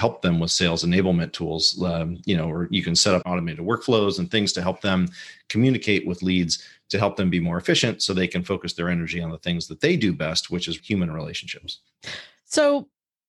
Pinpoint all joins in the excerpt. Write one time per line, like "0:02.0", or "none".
0:03.2
0:10.8